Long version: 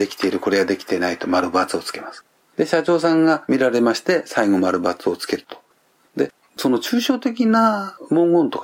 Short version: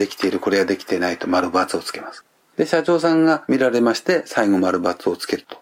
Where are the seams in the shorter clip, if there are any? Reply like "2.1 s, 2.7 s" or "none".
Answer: none